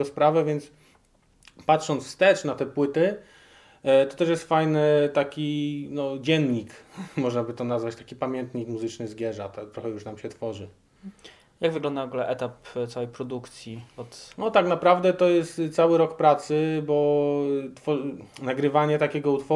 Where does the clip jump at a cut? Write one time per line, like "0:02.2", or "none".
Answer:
none